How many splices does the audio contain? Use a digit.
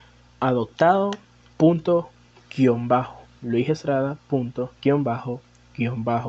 2